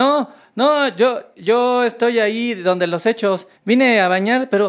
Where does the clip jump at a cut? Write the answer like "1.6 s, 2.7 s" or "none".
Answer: 3.6 s